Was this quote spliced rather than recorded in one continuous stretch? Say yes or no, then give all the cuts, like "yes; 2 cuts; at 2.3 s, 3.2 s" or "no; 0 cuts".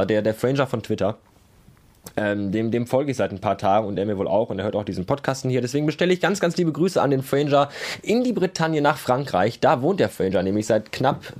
no; 0 cuts